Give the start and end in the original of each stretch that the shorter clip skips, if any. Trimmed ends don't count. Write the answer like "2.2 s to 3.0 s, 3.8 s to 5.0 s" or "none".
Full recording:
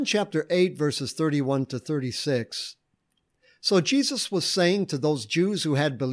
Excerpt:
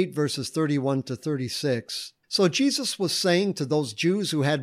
2.9 s to 3.6 s